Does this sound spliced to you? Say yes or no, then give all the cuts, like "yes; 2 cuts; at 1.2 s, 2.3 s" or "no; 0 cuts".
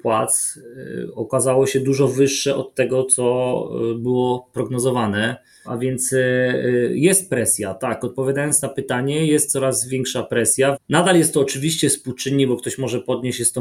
yes; 2 cuts; at 5.6 s, 10.7 s